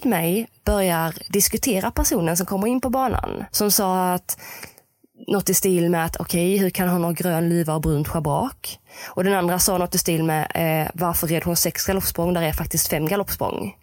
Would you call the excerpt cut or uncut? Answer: uncut